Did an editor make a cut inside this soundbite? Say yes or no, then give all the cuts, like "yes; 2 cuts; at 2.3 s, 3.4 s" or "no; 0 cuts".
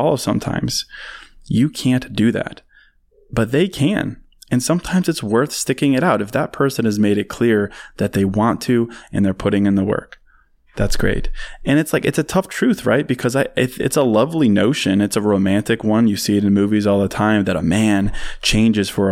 no; 0 cuts